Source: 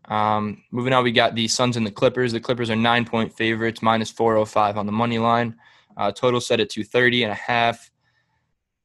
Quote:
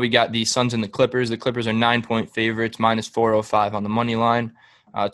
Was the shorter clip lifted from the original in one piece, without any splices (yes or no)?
yes